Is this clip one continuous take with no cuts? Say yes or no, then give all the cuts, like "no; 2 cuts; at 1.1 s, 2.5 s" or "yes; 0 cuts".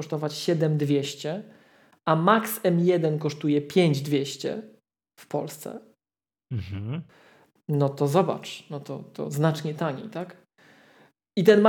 yes; 0 cuts